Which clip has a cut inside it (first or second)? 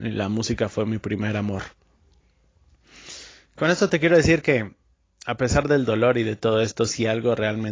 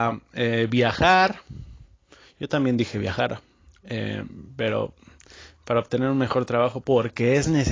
second